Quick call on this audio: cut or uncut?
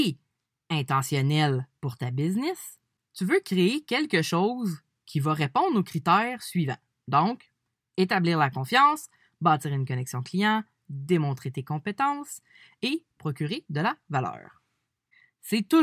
cut